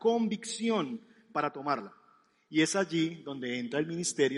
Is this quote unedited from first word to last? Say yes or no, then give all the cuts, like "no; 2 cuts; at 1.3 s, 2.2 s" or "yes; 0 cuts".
yes; 0 cuts